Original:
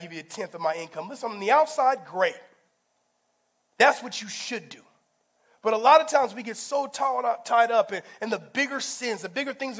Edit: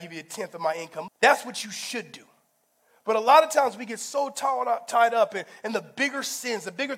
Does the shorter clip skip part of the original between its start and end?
yes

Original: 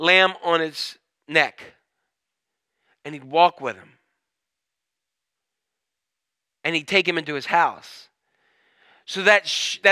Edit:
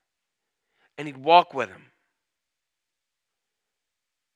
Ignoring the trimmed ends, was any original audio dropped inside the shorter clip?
no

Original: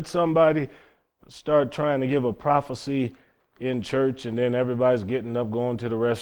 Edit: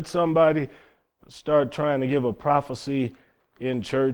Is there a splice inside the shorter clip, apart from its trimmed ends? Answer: no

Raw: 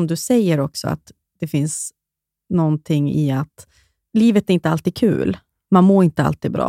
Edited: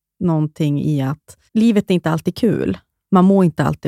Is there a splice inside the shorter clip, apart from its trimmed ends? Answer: yes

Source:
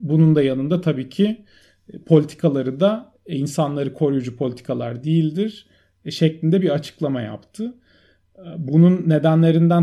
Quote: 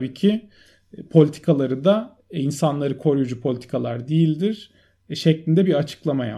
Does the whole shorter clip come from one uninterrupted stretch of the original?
yes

